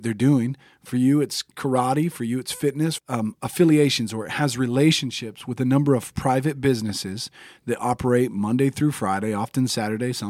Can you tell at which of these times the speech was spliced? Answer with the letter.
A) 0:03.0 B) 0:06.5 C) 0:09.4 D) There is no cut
A